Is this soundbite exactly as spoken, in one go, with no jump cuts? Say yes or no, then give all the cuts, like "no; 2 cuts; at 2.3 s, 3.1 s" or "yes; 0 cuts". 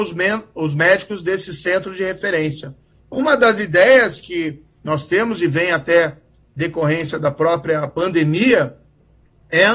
no; 1 cut; at 3.0 s